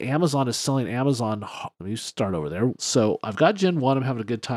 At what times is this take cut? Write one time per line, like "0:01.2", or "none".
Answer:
0:01.7
0:02.8